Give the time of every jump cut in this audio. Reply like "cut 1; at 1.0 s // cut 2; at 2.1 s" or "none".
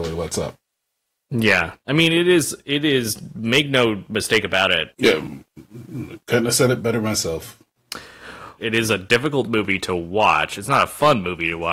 cut 1; at 4.9 s // cut 2; at 8.6 s